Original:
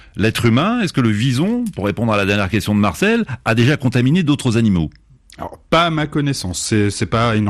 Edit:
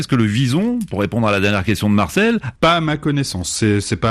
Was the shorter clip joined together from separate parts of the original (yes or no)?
yes